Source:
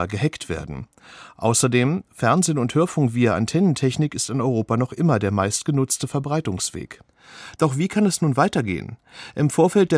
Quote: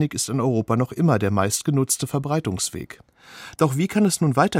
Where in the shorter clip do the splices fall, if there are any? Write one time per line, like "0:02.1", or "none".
none

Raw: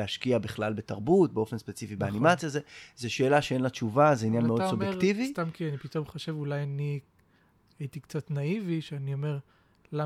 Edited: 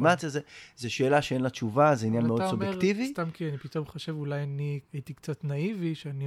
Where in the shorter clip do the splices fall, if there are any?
0:04.9

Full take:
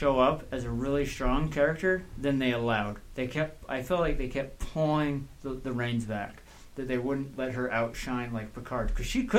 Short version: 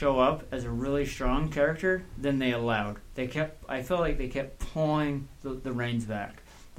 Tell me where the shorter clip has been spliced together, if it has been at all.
none

